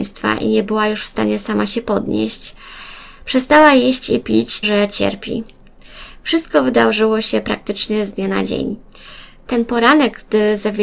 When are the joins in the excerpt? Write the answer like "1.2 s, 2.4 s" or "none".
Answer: 4.6 s